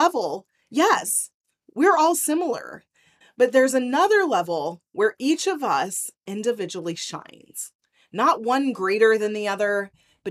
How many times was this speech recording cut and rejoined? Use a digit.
1